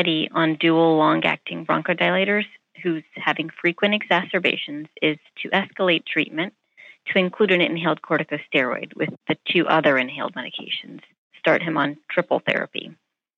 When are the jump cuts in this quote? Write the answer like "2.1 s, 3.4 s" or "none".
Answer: 11.3 s